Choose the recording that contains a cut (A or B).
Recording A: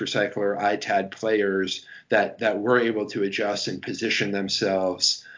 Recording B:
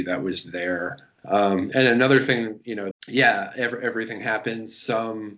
B